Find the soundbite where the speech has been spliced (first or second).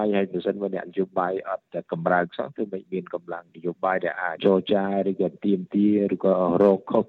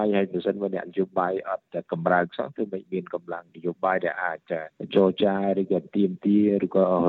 first